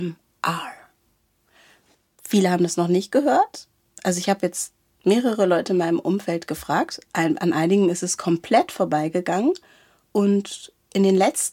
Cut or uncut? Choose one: uncut